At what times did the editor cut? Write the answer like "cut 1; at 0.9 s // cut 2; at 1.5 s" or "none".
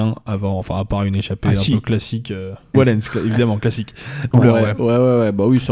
cut 1; at 2.7 s // cut 2; at 4.3 s